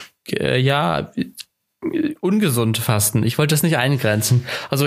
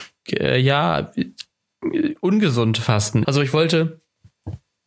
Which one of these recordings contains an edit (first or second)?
second